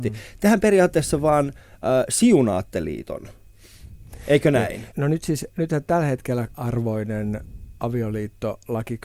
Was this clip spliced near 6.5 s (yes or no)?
yes